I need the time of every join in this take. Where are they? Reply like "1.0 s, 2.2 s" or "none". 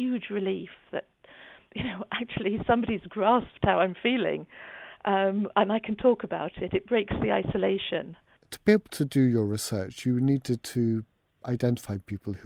none